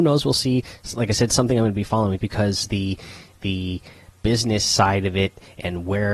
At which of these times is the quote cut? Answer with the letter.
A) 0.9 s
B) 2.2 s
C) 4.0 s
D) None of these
B